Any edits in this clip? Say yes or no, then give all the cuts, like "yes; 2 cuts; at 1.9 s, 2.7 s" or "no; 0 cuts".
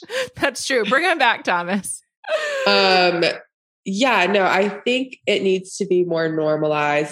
no; 0 cuts